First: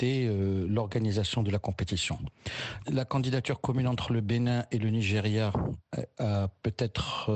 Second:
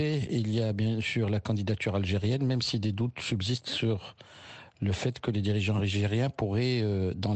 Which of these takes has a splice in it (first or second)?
first